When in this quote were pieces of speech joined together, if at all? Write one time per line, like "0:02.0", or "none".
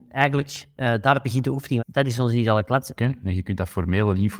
0:01.8
0:03.0